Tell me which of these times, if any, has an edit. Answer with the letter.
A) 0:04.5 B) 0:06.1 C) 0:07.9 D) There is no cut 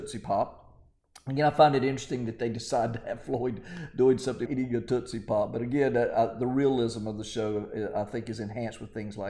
A